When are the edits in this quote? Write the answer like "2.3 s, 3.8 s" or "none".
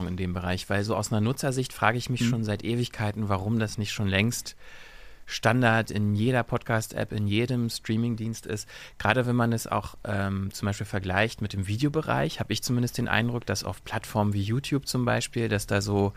none